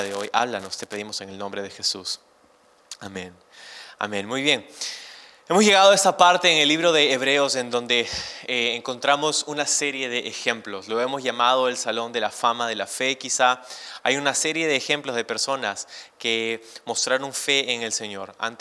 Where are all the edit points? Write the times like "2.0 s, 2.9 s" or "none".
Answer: none